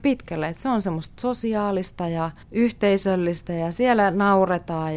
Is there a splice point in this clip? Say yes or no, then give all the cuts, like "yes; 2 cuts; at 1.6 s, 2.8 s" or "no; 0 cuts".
yes; 1 cut; at 2.4 s